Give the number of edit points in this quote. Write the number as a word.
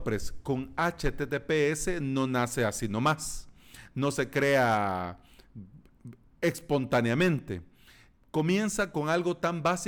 zero